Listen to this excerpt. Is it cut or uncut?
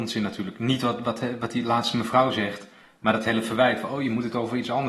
uncut